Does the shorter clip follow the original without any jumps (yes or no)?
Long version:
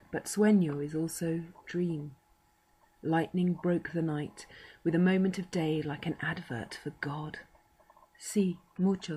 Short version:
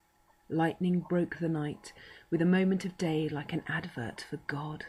yes